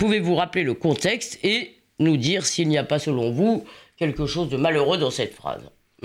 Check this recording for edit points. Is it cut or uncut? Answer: uncut